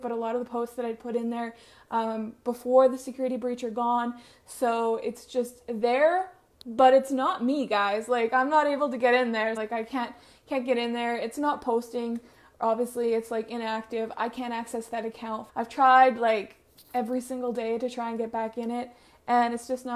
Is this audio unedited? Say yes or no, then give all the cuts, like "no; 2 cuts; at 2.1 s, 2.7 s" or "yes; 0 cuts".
no; 2 cuts; at 9.6 s, 15.5 s